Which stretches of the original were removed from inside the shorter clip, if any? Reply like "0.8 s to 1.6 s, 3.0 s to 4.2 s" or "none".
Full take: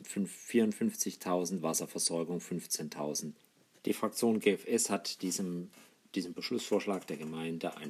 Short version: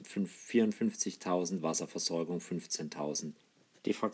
none